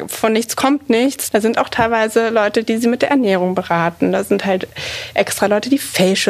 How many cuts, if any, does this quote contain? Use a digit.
1